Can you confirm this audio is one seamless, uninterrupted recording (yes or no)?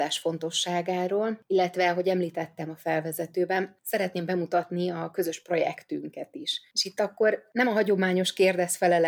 yes